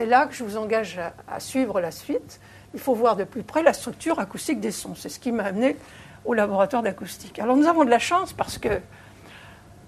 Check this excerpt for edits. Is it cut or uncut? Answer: uncut